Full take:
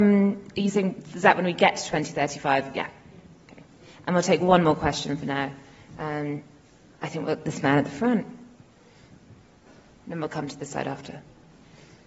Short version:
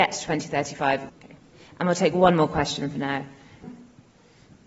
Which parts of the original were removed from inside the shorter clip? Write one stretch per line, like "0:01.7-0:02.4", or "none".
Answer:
0:02.7-0:03.4
0:05.9-0:08.3